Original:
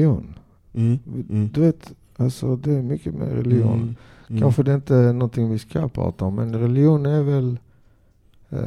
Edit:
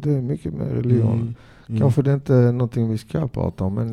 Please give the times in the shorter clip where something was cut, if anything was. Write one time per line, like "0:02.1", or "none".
none